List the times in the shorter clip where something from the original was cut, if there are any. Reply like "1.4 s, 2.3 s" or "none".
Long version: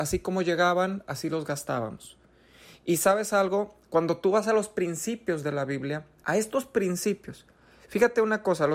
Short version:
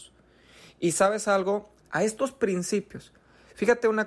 1.8 s